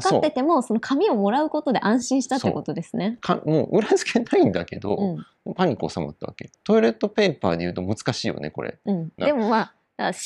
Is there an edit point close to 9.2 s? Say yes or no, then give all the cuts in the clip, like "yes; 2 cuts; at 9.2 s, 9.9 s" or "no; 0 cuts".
yes; 2 cuts; at 6.5 s, 9.2 s